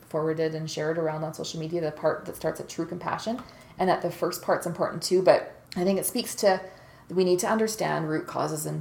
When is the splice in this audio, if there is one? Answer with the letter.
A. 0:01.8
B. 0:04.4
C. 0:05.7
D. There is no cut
C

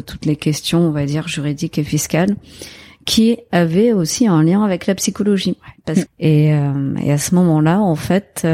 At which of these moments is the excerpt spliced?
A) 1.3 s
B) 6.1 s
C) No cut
B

